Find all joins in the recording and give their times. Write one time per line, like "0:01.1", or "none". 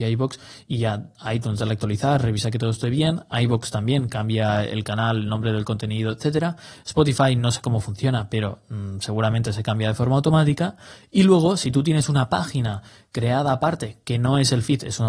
none